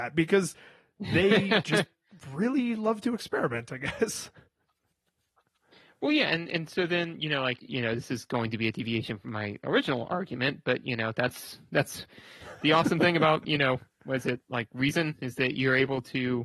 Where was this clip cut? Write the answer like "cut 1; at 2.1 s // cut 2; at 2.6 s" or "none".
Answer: cut 1; at 7.6 s